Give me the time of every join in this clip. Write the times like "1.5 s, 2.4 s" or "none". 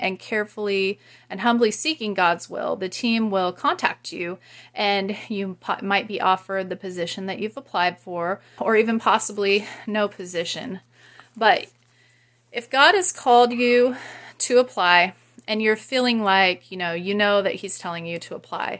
8.6 s